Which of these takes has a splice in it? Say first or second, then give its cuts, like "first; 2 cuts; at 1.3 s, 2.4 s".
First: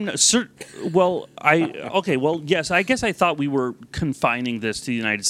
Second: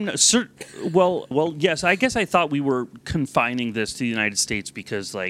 second; 1 cut; at 1.3 s